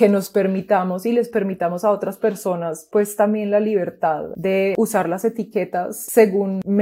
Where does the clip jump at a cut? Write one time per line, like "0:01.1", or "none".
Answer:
none